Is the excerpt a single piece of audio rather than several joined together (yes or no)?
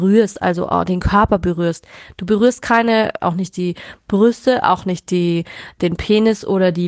no